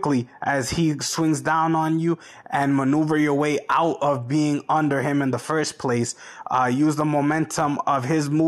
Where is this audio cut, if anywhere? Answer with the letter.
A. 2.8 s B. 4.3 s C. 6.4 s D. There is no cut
D